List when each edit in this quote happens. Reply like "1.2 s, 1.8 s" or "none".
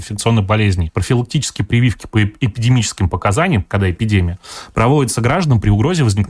0.9 s, 3.6 s